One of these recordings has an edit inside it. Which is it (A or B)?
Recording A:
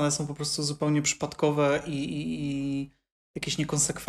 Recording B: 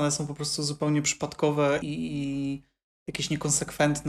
B